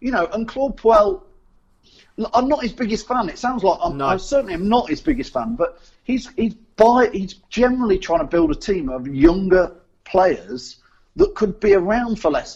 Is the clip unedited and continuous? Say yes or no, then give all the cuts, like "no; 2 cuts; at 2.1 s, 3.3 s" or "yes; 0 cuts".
no; 1 cut; at 2.3 s